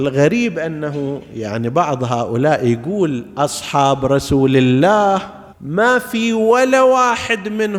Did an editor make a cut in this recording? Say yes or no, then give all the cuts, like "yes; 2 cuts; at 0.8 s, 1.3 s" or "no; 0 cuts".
yes; 1 cut; at 5.5 s